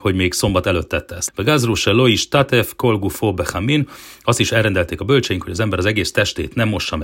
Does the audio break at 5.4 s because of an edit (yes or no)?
no